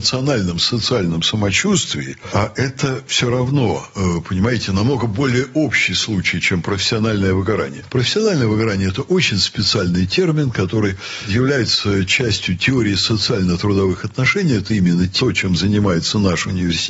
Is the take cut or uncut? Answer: uncut